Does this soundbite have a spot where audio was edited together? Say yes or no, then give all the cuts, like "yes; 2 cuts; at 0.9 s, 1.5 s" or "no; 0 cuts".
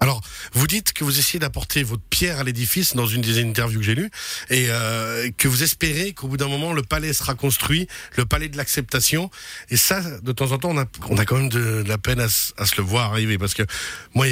yes; 1 cut; at 11.0 s